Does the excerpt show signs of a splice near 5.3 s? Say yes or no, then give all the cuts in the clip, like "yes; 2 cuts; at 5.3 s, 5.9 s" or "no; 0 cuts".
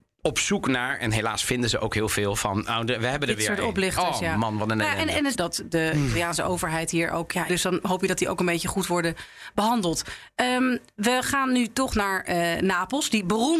yes; 2 cuts; at 5.3 s, 7.5 s